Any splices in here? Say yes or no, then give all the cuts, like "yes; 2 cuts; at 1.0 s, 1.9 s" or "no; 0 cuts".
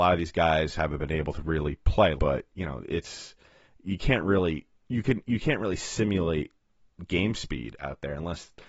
yes; 2 cuts; at 2.2 s, 4.8 s